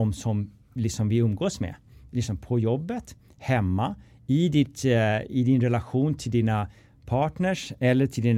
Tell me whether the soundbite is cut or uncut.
uncut